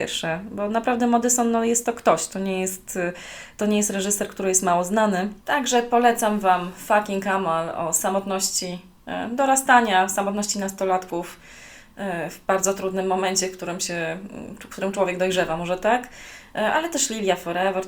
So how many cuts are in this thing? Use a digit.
1